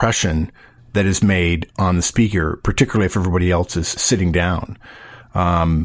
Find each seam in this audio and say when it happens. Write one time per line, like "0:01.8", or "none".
0:04.0